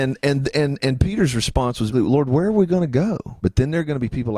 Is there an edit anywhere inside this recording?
yes; 2 cuts; at 1.9 s, 3.4 s

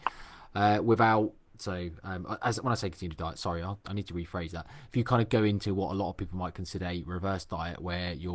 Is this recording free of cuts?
no; 1 cut; at 1.5 s

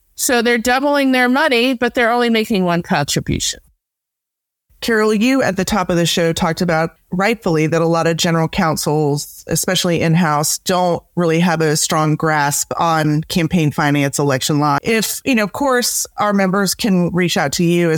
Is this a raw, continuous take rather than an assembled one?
no; 1 cut; at 14.8 s

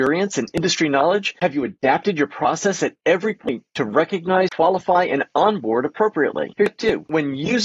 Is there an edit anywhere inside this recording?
yes; 2 cuts; at 4.5 s, 6.5 s

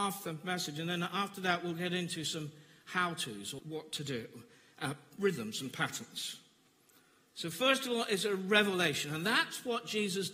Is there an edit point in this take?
yes; 1 cut; at 3.6 s

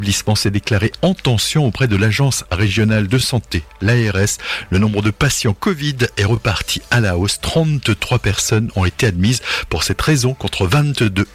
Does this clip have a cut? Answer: no; 0 cuts

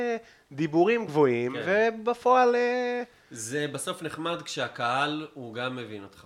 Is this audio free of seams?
no; 1 cut; at 1.1 s

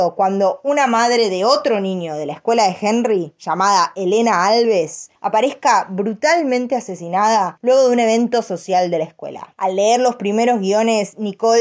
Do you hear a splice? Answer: yes; 1 cut; at 9.6 s

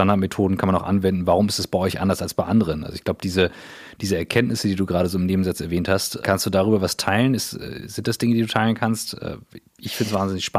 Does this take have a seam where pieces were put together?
yes; 1 cut; at 6.2 s

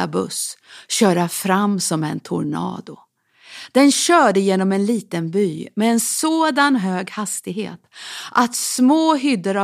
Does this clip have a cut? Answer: no; 0 cuts

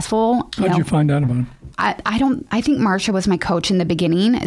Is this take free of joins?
no; 1 cut; at 1.7 s

